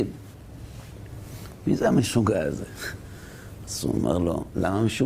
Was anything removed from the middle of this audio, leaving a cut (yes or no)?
no